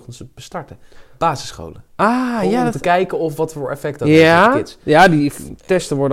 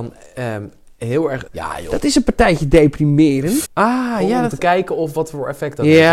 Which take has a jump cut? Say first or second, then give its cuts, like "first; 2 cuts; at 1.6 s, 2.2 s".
second; 2 cuts; at 1.5 s, 3.6 s